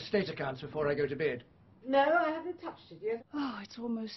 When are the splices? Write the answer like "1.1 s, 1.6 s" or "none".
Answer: 1.8 s, 3.2 s